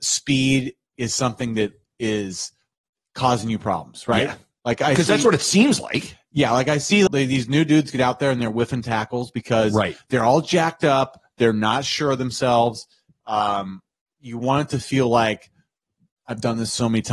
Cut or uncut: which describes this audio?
cut